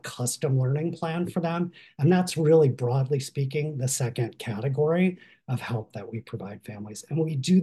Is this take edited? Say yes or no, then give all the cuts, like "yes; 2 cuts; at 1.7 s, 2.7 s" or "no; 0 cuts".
no; 0 cuts